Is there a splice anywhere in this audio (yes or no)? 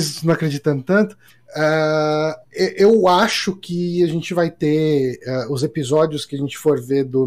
no